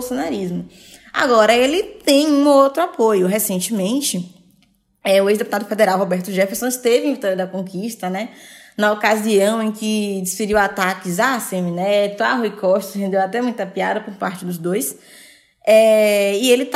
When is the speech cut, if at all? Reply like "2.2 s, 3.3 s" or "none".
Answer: none